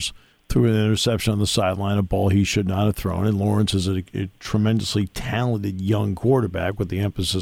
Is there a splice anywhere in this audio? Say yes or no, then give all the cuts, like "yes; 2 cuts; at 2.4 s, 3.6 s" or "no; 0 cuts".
no; 0 cuts